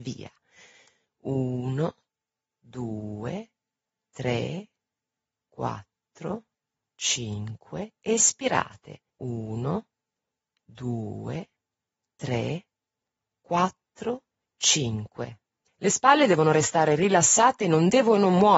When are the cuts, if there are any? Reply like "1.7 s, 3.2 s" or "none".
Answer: 9.1 s

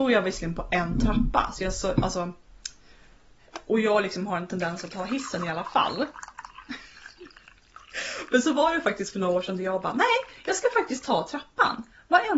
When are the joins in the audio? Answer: 3.7 s

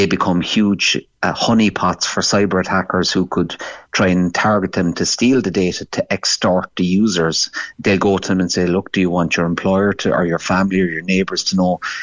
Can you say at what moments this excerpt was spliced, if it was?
none

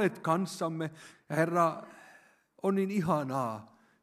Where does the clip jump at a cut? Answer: 1.1 s

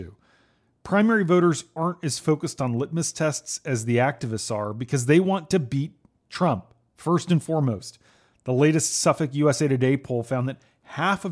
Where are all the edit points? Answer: none

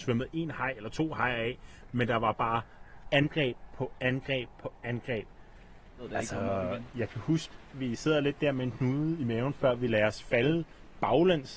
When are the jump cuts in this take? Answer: 6.0 s

